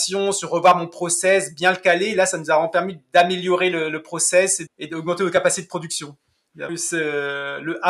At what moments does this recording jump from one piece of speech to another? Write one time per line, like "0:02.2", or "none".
0:04.7
0:06.7